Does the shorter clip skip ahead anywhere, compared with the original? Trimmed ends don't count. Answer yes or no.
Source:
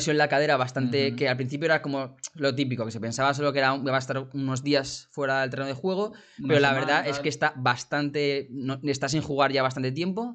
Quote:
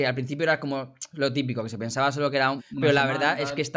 yes